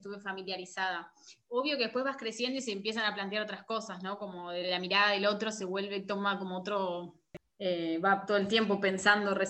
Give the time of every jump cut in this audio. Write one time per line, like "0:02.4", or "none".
none